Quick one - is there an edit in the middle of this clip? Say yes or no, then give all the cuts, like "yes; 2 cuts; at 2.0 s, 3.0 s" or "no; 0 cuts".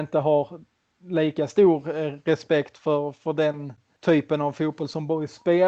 no; 0 cuts